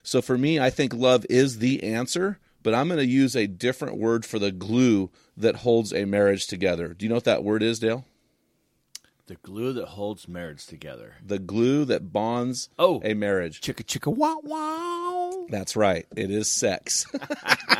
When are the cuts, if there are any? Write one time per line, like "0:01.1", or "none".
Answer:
none